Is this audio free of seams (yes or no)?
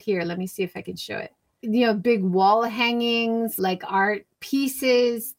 no